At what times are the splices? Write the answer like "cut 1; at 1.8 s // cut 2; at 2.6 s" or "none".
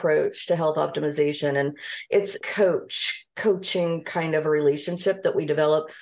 cut 1; at 2.4 s